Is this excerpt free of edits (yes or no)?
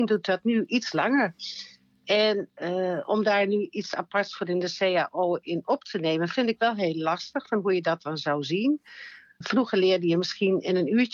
no